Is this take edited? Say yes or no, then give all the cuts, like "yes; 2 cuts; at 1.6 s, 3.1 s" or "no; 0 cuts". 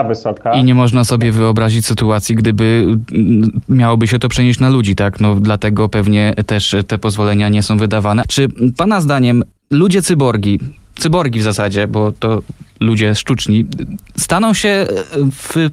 yes; 1 cut; at 8.2 s